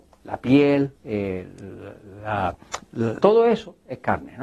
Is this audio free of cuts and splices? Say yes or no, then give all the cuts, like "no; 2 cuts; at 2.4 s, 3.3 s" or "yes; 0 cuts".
no; 2 cuts; at 0.9 s, 3.2 s